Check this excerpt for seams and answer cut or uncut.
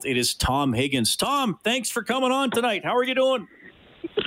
uncut